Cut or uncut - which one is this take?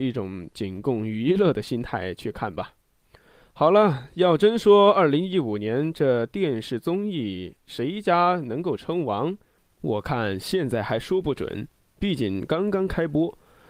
uncut